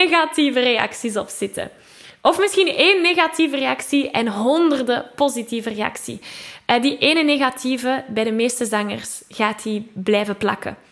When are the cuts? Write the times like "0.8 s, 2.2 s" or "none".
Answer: none